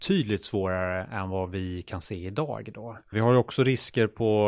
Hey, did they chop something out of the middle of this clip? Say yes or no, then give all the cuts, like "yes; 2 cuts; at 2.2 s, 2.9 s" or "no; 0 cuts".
yes; 1 cut; at 3.1 s